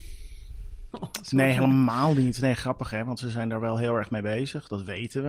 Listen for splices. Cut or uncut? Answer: cut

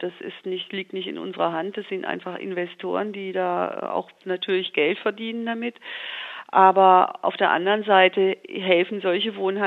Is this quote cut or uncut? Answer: uncut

